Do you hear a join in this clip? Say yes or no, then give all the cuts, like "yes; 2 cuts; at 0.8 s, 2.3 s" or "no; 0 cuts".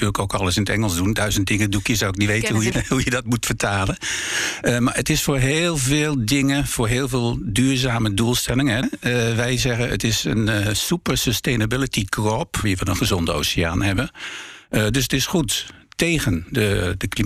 yes; 3 cuts; at 2.7 s, 8.8 s, 12.6 s